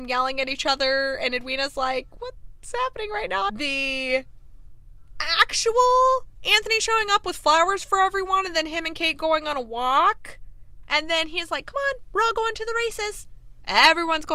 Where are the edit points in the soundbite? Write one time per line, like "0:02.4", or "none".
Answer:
0:03.5
0:10.8